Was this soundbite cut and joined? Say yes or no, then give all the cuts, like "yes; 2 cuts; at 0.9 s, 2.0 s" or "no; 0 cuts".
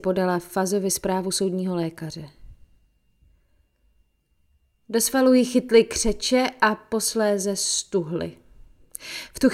no; 0 cuts